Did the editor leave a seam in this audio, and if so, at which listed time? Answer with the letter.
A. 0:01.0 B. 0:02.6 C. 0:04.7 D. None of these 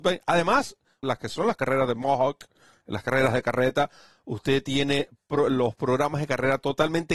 A